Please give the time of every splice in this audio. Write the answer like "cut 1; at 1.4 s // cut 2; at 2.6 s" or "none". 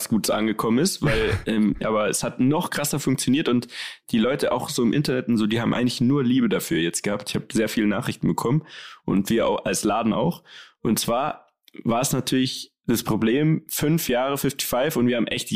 cut 1; at 1.8 s